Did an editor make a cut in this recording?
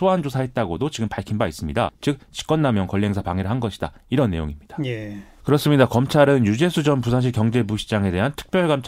yes; 2 cuts; at 1.9 s, 5.4 s

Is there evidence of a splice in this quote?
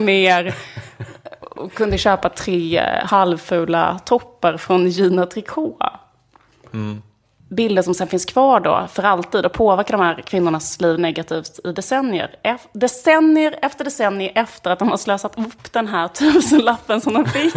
yes; 1 cut; at 7.4 s

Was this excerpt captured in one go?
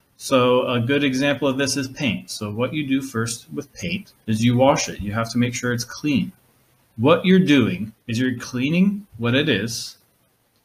no; 3 cuts; at 4.2 s, 6.8 s, 8.0 s

